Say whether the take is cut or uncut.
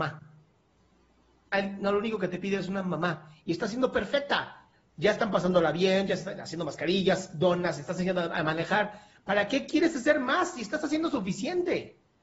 uncut